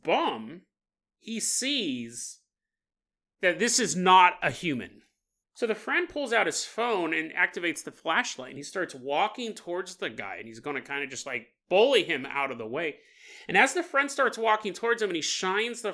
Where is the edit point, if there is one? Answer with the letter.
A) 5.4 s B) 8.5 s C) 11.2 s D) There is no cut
A